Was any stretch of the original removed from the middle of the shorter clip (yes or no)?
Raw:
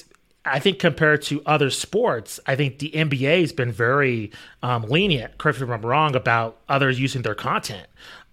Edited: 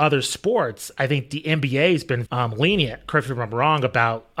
yes